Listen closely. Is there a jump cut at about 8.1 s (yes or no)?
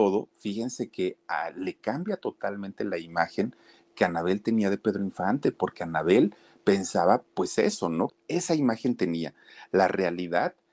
yes